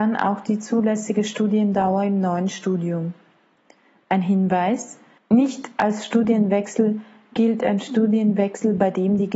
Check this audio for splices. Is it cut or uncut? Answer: uncut